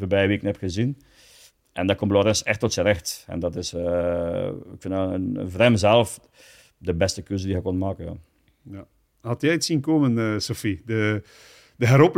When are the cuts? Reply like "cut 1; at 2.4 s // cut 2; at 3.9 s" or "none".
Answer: none